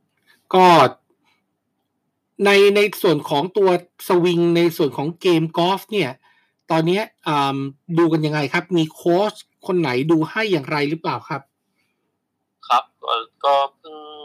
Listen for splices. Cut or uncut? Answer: uncut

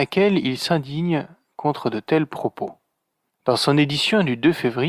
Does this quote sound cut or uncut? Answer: cut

